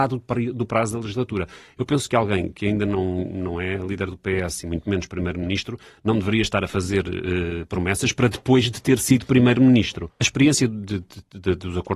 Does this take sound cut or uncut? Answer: cut